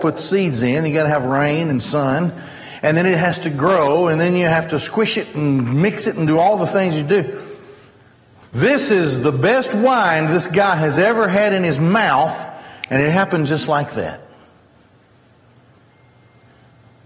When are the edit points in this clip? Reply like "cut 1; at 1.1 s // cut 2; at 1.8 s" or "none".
none

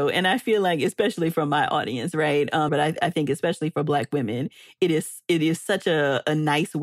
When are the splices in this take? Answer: cut 1; at 2.7 s

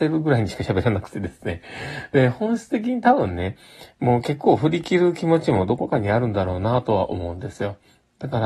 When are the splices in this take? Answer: none

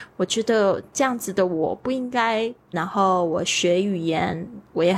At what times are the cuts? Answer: cut 1; at 2.7 s

